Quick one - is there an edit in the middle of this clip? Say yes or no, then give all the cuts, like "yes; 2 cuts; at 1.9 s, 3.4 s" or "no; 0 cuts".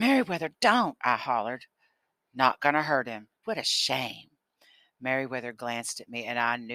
yes; 1 cut; at 3.4 s